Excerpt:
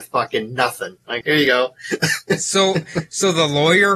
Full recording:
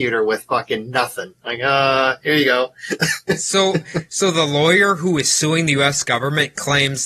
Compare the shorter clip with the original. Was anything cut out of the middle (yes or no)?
yes